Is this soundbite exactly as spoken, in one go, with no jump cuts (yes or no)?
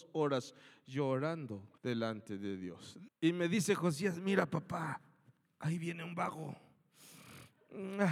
no